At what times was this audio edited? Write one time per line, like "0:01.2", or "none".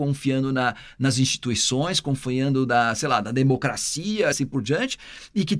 none

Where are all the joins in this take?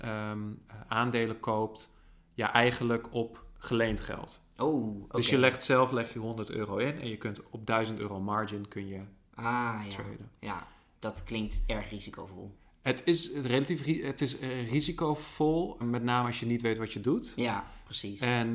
0:15.8

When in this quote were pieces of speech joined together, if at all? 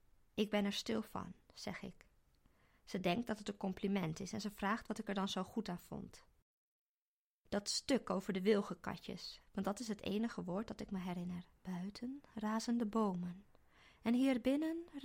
0:09.4
0:11.6

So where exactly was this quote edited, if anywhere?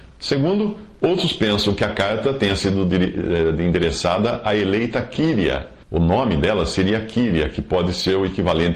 0:05.8

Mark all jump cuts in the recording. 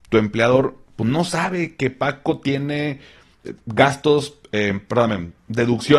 none

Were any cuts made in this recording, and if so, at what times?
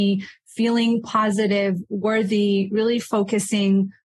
none

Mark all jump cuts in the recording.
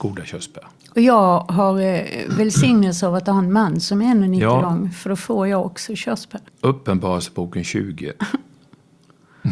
0:06.5

